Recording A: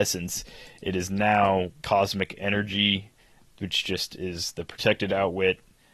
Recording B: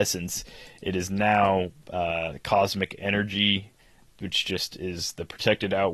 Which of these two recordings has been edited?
A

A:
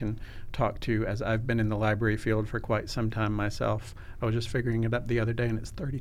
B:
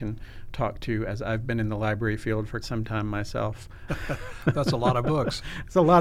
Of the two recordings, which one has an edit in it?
B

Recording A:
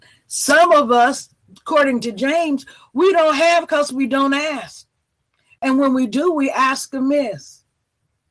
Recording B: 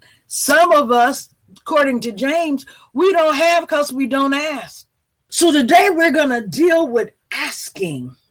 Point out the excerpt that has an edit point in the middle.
B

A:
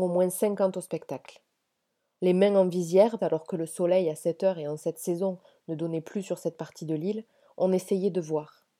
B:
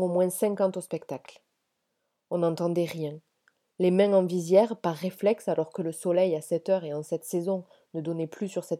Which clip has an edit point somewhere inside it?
A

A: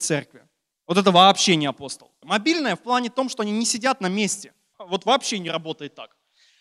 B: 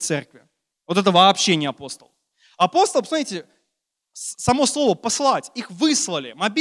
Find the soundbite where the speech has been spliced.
A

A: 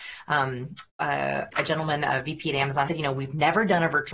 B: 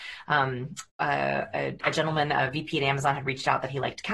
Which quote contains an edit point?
A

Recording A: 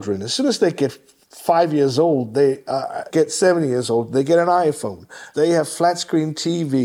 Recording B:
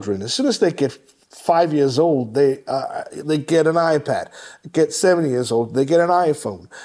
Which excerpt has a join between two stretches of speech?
A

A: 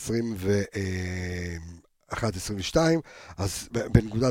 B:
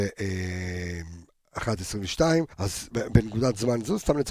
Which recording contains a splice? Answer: B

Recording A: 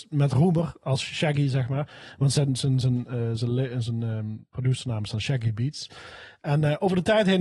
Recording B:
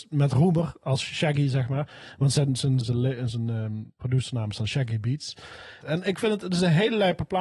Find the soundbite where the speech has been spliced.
B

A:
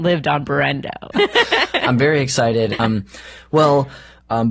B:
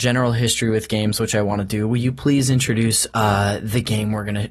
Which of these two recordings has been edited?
A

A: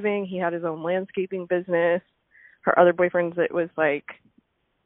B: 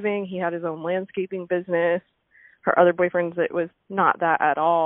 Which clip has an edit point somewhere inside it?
B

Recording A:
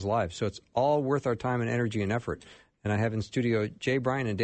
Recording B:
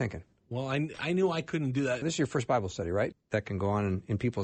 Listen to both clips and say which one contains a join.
B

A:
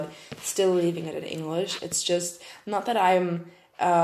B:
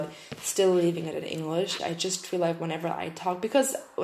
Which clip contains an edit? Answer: B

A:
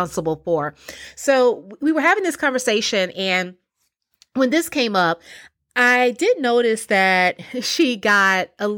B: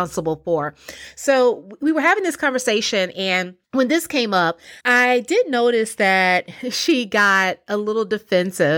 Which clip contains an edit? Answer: B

